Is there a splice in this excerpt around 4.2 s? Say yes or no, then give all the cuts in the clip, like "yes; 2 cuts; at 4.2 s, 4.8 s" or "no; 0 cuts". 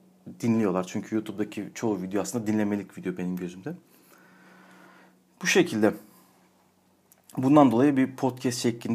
no; 0 cuts